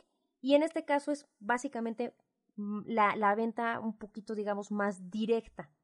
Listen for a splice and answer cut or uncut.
uncut